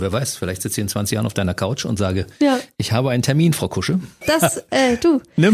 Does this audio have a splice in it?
yes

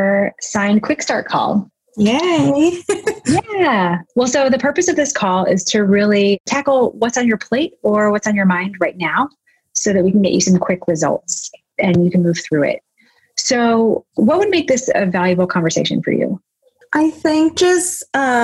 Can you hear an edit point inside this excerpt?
no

